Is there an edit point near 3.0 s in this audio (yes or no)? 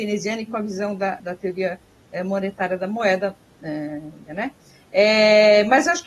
no